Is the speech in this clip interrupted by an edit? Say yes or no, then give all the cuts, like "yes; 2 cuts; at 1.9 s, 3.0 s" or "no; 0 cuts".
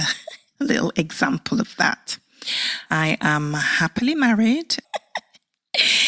yes; 1 cut; at 4.8 s